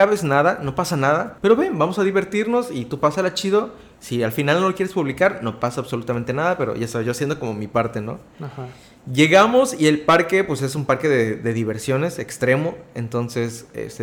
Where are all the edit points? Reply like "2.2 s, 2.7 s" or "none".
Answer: none